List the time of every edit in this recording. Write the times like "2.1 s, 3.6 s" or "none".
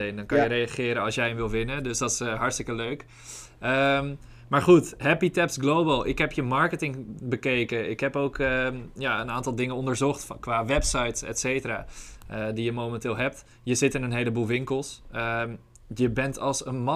none